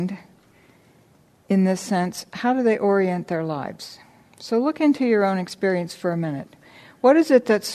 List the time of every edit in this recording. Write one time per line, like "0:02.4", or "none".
none